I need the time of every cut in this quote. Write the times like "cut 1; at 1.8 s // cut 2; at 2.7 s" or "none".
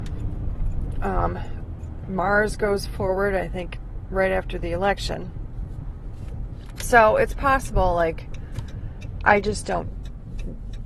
none